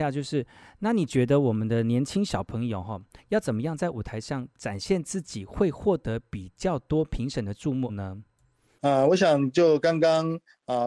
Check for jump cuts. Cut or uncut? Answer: uncut